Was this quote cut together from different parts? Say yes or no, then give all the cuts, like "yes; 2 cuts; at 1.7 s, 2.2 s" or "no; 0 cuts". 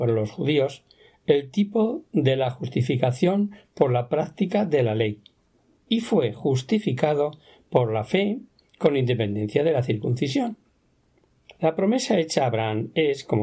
no; 0 cuts